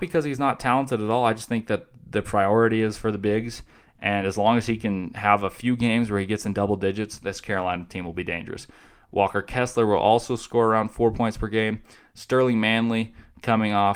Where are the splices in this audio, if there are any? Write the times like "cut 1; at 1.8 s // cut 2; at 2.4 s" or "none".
none

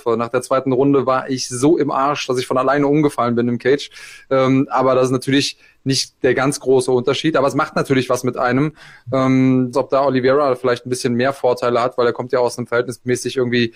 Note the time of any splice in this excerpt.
cut 1; at 9.7 s

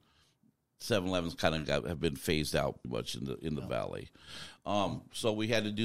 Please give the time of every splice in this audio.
cut 1; at 2.8 s

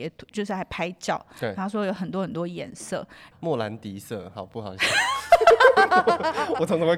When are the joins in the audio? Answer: cut 1; at 3.3 s

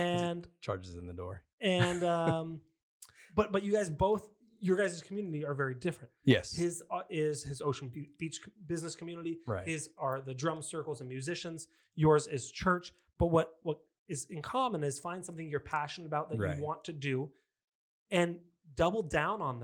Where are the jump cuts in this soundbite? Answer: none

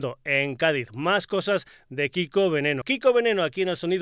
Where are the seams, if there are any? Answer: cut 1; at 2.8 s

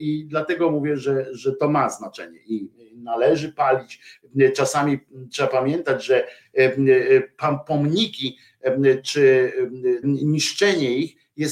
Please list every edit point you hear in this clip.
cut 1; at 10.0 s

